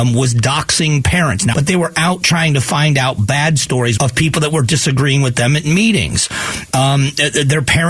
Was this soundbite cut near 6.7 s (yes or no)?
no